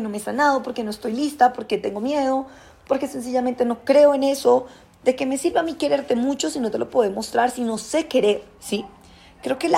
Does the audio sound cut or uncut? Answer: uncut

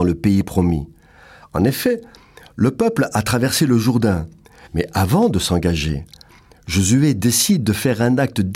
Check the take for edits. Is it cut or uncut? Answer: cut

